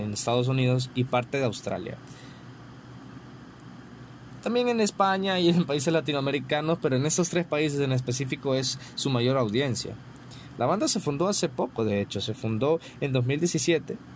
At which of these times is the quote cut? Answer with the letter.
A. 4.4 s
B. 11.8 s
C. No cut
C